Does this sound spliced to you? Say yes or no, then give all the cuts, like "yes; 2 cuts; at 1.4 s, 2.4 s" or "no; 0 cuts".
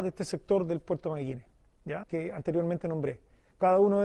yes; 1 cut; at 2.0 s